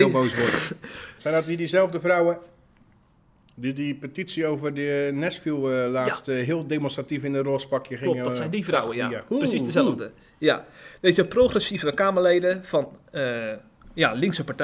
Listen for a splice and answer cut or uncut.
cut